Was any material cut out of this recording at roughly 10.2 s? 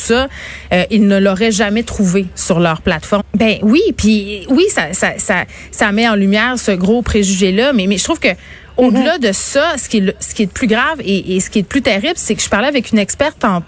no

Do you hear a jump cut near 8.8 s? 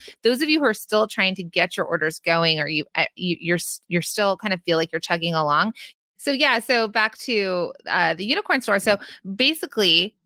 no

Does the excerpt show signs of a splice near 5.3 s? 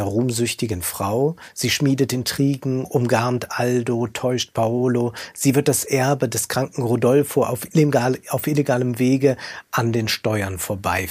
no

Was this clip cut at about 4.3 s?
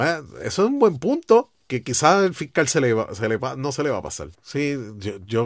yes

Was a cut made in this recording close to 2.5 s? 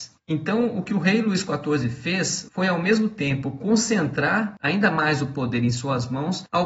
yes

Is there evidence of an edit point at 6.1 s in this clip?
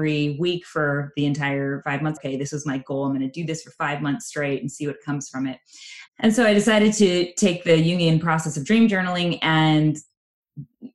yes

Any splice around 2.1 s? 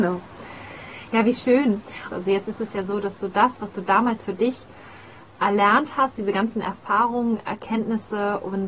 yes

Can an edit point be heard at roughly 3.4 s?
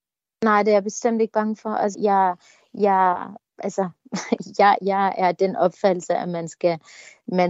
yes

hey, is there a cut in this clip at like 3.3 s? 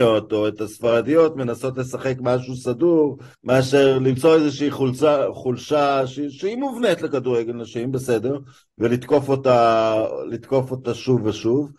yes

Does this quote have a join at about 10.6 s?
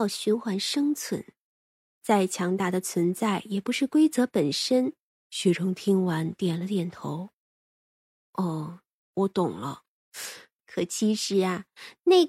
yes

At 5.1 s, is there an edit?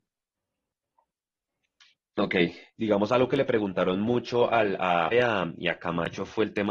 yes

